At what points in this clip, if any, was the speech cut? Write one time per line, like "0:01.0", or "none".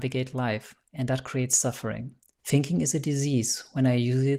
0:02.4